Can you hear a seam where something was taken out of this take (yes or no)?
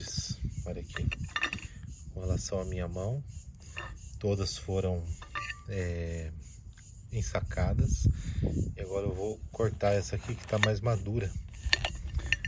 no